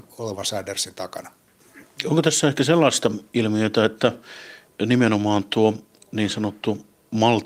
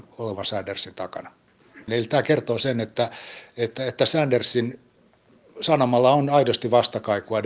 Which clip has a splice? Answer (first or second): second